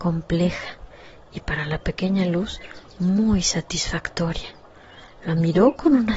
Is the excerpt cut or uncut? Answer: uncut